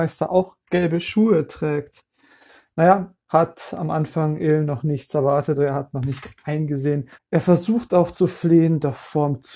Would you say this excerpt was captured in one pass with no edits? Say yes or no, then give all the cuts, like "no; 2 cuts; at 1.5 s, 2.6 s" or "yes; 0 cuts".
no; 3 cuts; at 3.2 s, 5.5 s, 7.1 s